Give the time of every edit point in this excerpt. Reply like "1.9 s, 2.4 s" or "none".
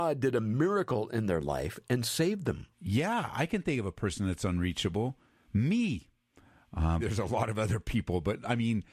2.7 s, 7.0 s